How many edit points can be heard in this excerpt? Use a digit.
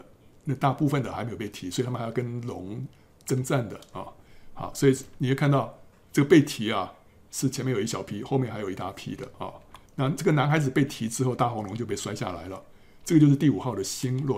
1